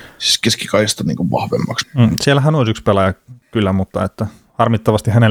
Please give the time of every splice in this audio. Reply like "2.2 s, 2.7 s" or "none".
1.8 s, 3.4 s